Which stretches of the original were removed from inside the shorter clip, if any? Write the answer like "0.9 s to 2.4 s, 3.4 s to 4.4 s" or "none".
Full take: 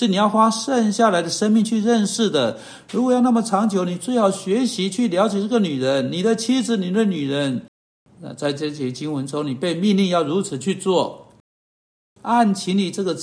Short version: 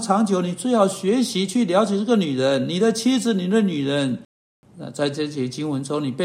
none

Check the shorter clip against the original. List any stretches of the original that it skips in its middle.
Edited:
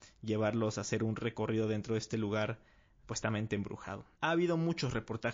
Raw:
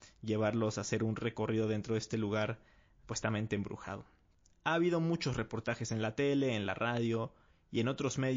4.1 s to 4.6 s

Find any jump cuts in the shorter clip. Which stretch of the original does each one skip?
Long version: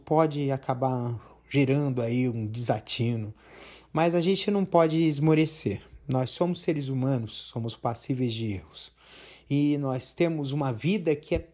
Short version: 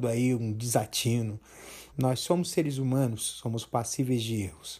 3.8 s to 6.0 s

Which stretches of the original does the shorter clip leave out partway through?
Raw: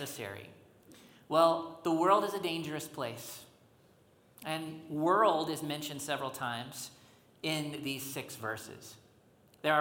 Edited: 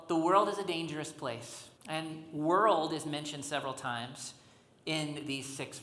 3.5 s to 4.3 s

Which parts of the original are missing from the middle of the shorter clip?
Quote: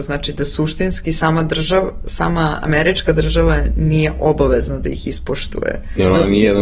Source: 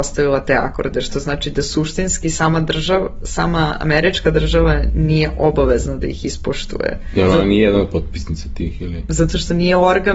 none

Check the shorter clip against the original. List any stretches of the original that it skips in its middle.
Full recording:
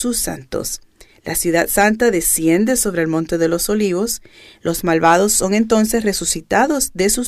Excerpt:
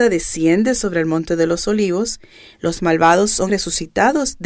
5.5 s to 6.0 s

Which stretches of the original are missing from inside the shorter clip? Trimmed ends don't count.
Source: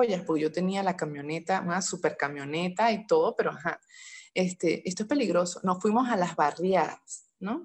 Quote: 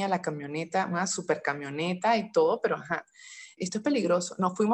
4.3 s to 4.8 s

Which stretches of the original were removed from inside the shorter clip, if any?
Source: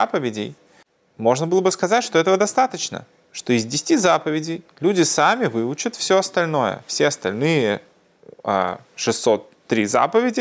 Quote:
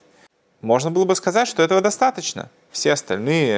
3.3 s to 6.8 s

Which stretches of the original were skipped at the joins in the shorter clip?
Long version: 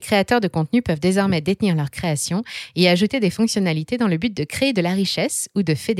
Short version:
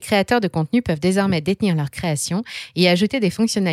none

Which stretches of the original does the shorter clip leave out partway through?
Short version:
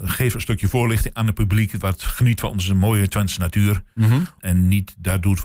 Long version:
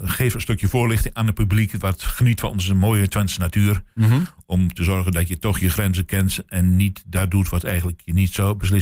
4.4 s to 6.5 s

